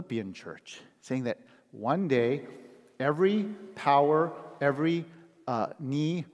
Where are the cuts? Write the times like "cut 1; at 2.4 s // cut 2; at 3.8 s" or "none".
none